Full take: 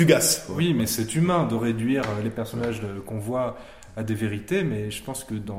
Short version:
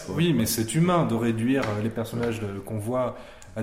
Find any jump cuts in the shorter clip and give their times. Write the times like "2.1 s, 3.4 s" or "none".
none